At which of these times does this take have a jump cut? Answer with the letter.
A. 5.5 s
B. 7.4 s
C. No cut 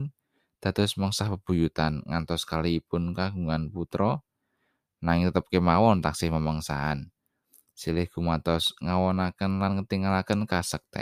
C